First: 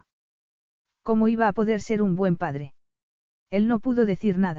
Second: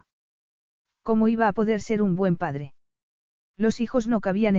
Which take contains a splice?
first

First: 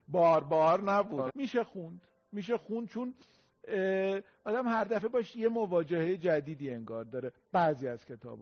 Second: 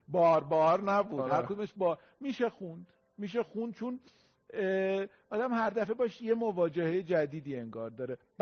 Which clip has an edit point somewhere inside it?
first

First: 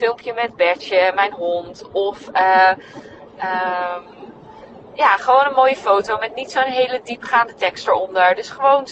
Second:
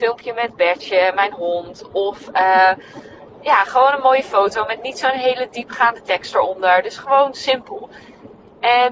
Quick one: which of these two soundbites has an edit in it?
second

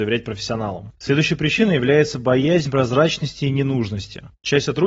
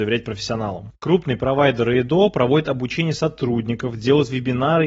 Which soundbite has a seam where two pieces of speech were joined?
first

